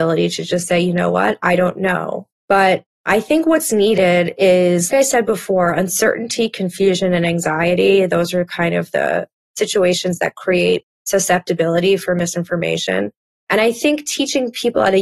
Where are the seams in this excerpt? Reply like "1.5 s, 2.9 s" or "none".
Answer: 2.3 s, 4.9 s